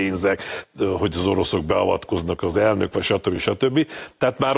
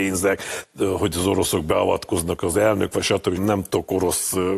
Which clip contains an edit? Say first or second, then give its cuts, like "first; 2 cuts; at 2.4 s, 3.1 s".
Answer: second; 1 cut; at 3.4 s